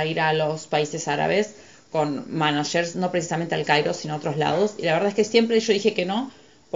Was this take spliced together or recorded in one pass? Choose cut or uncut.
uncut